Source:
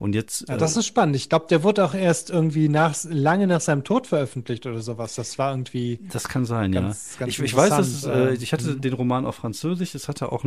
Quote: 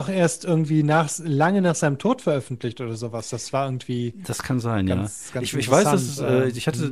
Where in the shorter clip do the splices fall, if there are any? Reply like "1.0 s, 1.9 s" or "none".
none